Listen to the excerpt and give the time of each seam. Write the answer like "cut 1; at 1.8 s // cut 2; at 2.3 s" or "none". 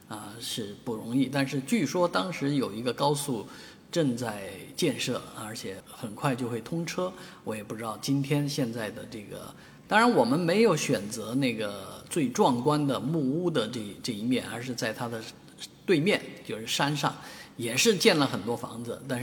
cut 1; at 5.8 s // cut 2; at 9.9 s